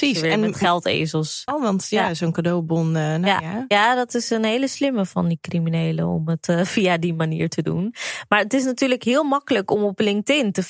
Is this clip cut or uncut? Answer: cut